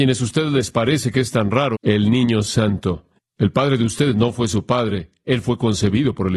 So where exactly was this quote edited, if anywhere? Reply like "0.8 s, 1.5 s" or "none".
1.7 s, 3.2 s